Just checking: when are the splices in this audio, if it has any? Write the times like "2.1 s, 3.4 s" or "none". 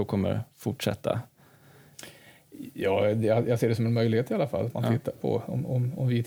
5.2 s

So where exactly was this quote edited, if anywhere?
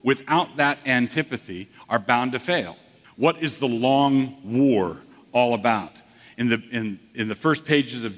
3.0 s

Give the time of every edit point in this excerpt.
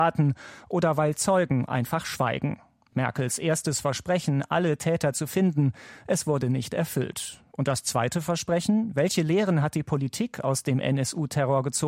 none

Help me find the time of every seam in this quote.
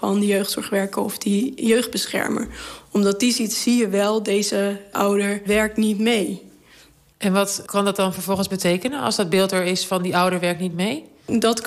none

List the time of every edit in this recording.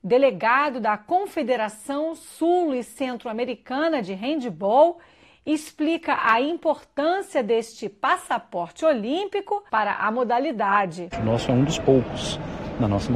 9.7 s, 11.1 s

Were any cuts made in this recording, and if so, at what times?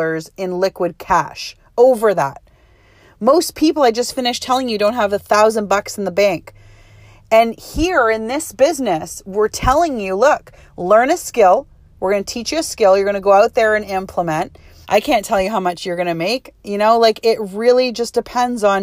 14.8 s

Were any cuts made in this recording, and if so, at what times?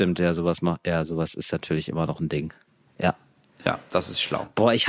none

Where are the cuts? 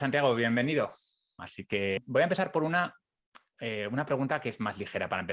1.4 s

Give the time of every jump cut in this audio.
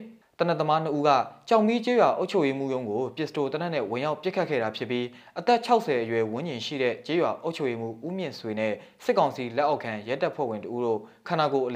none

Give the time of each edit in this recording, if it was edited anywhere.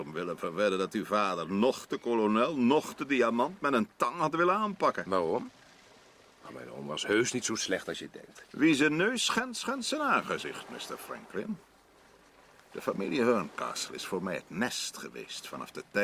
none

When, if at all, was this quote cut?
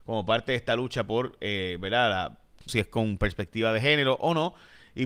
2.7 s

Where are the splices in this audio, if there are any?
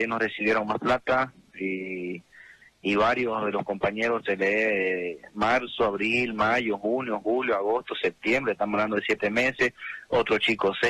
none

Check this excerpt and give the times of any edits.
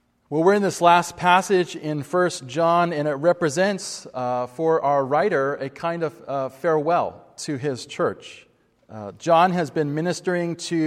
none

